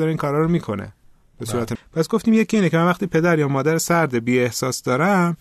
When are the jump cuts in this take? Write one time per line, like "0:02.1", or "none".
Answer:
0:01.8